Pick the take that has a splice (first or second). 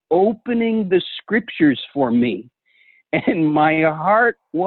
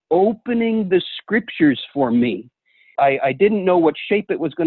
second